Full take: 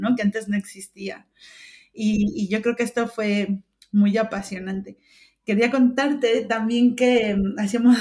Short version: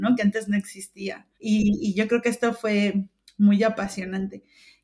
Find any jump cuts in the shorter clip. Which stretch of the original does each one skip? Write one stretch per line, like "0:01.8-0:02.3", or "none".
0:01.3-0:01.9